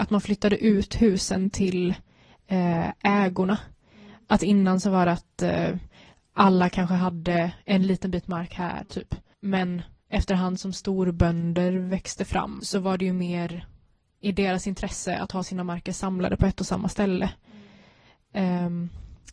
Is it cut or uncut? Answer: cut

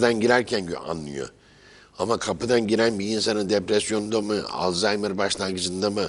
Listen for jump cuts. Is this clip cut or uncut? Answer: uncut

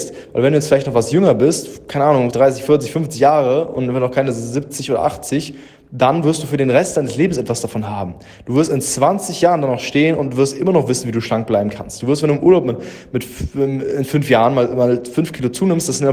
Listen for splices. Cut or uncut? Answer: cut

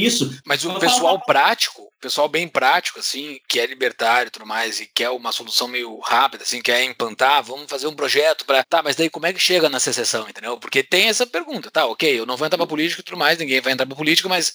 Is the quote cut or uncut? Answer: uncut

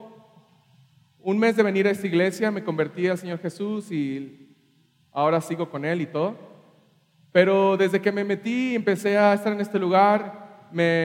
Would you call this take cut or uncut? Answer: uncut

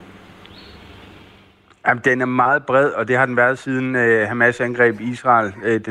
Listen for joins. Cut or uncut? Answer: uncut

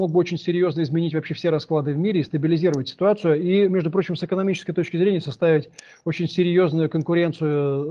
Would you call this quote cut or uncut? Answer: uncut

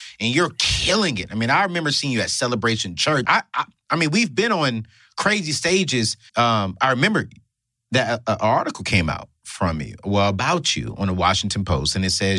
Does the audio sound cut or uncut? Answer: cut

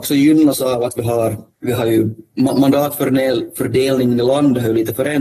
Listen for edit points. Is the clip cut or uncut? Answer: cut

